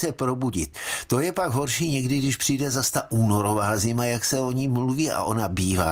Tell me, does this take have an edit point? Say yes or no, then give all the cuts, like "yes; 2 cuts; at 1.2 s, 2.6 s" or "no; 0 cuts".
no; 0 cuts